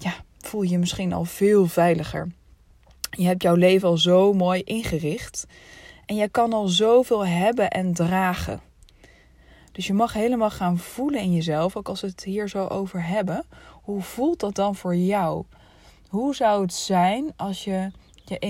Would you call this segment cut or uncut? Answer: uncut